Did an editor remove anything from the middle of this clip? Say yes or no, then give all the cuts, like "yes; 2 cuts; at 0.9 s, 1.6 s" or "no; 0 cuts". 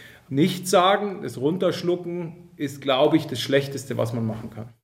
no; 0 cuts